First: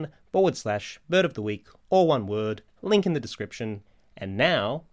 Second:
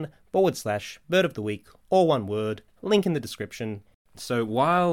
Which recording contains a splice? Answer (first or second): second